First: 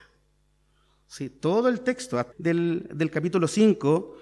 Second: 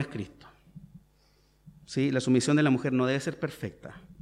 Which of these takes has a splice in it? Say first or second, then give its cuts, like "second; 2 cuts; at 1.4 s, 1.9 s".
first; 1 cut; at 2.3 s